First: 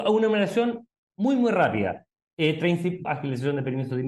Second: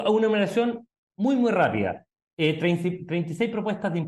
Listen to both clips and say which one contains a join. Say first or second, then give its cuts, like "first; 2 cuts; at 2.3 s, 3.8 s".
first; 1 cut; at 3.0 s